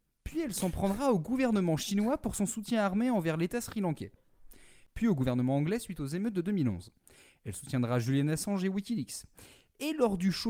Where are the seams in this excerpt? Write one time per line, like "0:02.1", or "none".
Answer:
none